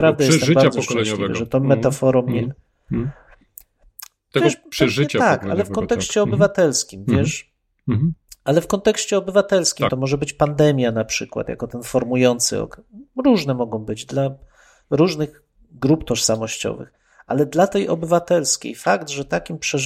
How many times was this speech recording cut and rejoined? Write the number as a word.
one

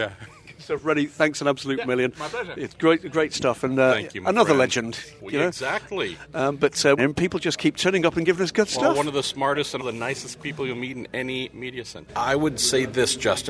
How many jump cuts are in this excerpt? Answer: three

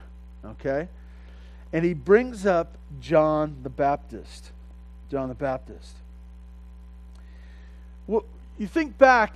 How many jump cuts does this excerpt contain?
zero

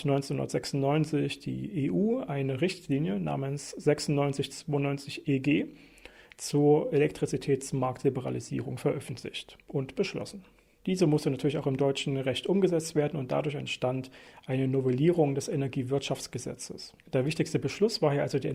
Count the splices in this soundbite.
one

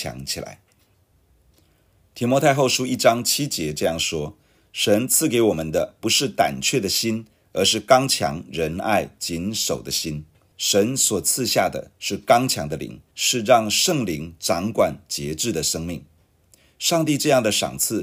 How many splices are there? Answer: two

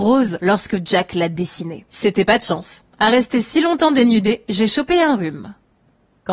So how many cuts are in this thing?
one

